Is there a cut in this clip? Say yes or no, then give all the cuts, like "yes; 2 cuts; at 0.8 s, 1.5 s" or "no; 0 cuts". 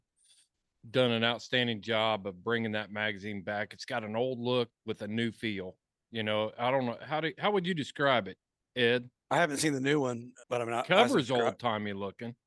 yes; 2 cuts; at 9.2 s, 10.4 s